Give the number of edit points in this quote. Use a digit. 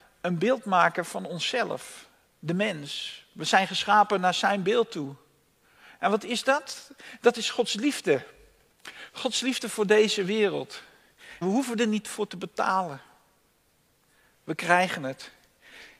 1